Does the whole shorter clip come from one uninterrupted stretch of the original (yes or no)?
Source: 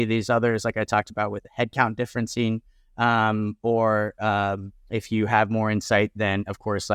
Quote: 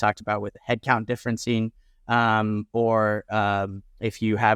yes